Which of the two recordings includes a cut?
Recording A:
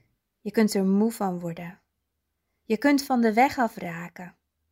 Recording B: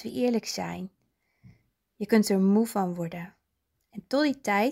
B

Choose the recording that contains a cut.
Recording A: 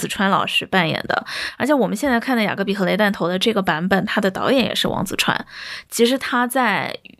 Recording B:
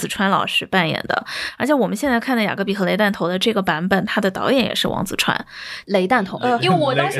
B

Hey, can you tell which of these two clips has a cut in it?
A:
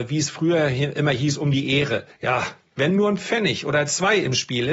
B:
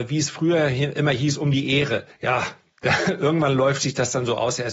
A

